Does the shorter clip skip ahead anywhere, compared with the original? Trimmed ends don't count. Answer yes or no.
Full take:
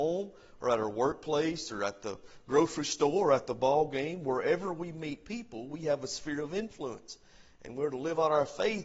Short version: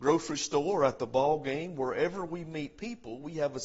no